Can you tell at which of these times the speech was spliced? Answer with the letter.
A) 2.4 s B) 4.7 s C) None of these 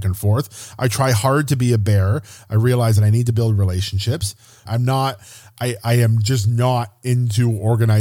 B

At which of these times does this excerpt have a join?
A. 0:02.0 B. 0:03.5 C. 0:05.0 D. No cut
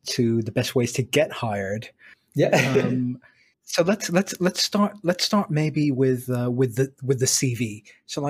B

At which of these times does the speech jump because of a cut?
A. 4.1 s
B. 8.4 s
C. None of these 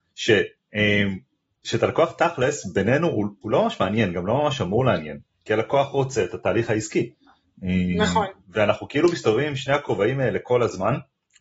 C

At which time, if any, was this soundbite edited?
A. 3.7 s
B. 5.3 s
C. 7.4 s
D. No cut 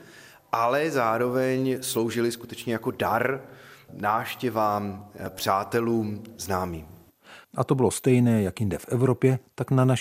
C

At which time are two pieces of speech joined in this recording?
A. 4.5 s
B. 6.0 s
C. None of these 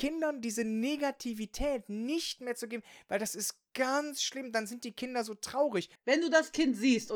B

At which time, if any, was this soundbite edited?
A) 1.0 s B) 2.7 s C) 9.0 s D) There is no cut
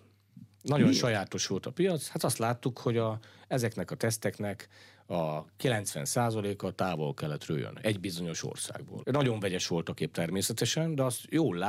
C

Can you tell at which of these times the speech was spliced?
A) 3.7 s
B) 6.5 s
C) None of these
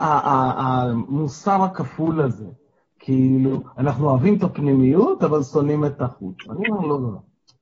C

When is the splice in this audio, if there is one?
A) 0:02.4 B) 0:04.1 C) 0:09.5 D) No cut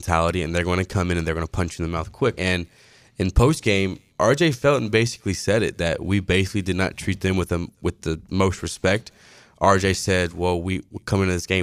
A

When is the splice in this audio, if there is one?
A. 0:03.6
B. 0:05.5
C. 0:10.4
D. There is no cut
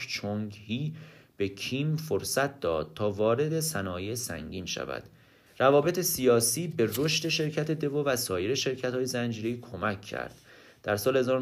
B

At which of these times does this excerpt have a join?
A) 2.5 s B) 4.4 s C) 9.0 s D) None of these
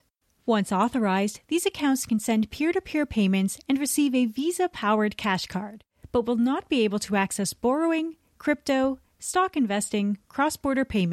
D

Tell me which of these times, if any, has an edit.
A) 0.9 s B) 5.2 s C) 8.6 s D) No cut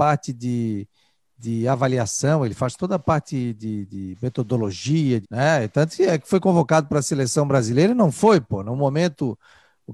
B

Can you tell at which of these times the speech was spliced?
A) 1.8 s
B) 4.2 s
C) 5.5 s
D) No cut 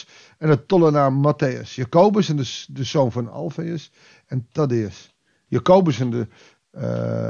C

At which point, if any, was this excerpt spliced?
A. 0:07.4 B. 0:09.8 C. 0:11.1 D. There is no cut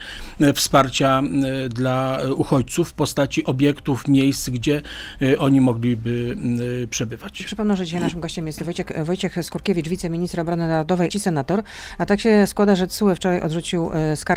C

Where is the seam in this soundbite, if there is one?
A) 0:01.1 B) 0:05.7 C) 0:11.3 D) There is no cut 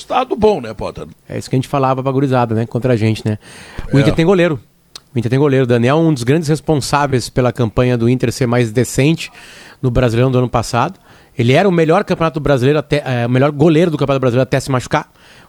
A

